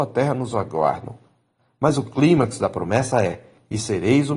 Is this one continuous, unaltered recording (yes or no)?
yes